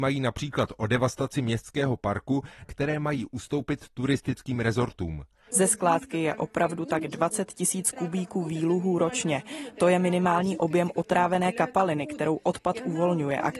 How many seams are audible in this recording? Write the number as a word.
two